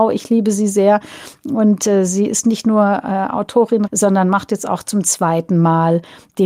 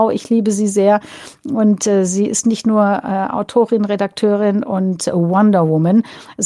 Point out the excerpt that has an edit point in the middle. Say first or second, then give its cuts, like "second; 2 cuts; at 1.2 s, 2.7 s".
first; 1 cut; at 3.9 s